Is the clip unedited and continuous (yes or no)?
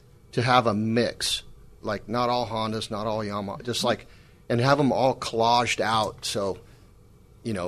yes